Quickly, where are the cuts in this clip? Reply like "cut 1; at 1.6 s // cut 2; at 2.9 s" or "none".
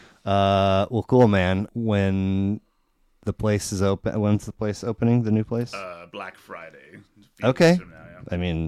cut 1; at 1.7 s